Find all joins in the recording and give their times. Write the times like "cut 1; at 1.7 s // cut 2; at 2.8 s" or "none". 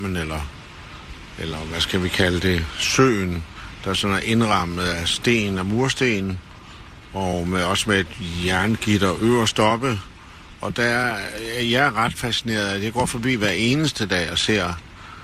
none